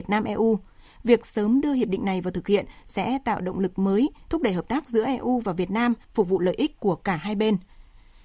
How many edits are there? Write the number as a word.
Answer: one